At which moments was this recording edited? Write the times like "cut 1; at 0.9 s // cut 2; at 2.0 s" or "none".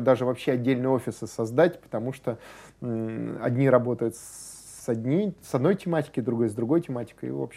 cut 1; at 4.8 s